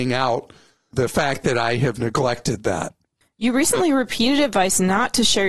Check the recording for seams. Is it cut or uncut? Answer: uncut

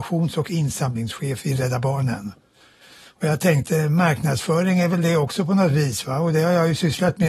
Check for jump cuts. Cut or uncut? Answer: uncut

